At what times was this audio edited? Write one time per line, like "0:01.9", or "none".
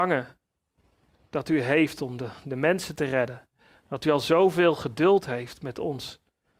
none